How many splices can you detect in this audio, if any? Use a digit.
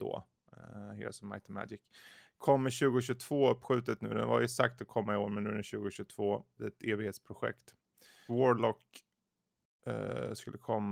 2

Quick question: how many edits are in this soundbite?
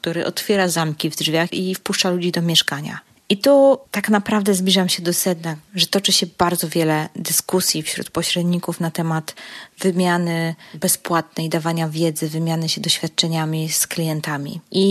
2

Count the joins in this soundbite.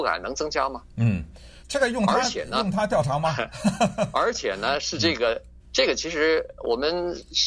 2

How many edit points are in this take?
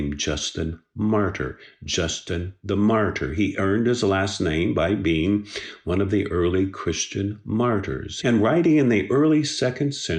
1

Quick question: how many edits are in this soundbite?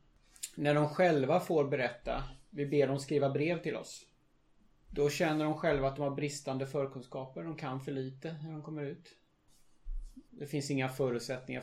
1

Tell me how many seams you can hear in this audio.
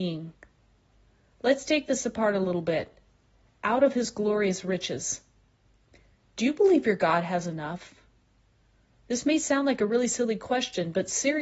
0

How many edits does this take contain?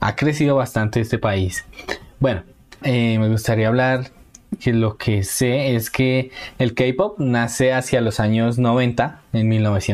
2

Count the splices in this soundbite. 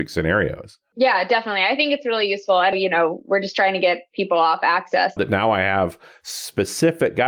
2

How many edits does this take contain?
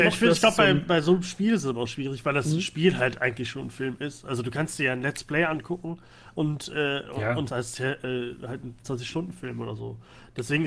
2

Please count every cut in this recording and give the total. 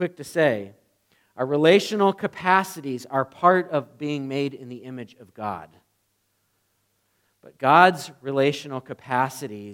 0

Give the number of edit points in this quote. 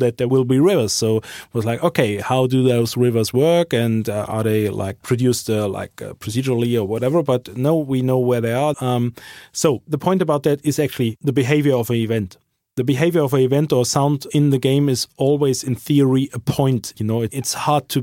3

